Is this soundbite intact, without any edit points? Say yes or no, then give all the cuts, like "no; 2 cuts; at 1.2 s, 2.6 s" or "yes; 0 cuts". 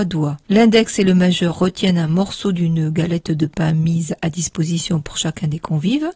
yes; 0 cuts